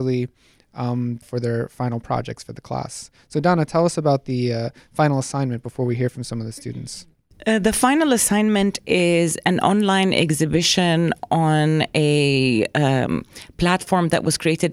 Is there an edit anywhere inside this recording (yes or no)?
yes